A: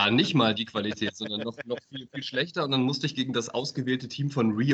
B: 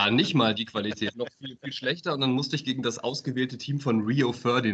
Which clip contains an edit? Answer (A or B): B